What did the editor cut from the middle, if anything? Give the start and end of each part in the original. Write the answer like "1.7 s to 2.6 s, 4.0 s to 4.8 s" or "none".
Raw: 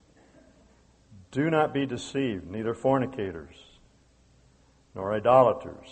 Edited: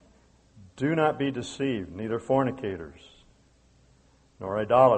none